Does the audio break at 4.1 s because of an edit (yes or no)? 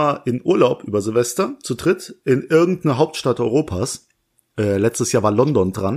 no